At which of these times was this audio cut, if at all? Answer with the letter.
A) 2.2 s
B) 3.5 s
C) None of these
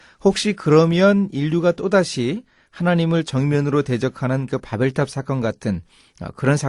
C